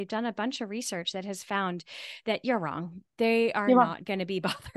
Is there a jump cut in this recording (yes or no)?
no